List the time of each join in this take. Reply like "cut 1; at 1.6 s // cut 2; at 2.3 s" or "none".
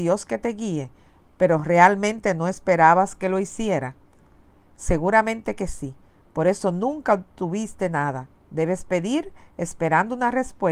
none